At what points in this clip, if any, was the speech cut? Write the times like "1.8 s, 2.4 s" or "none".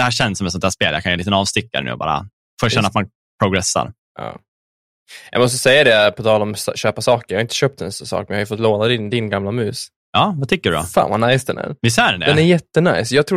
4.1 s